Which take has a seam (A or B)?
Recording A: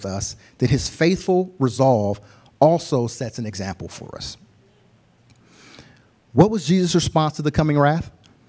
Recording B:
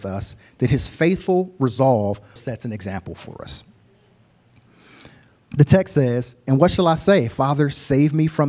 B